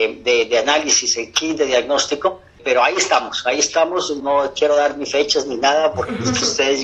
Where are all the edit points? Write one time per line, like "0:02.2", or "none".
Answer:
none